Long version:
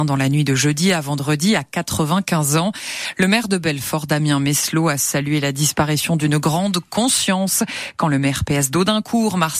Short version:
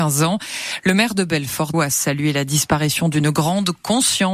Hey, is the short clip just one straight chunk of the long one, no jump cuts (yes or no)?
no